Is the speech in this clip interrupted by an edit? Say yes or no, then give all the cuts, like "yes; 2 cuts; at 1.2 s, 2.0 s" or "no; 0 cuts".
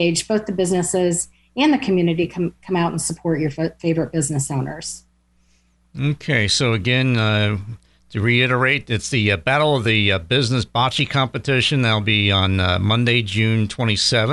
no; 0 cuts